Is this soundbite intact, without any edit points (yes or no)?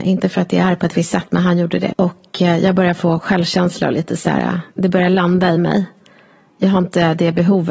no